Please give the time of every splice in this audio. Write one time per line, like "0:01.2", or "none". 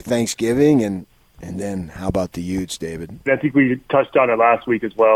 0:03.3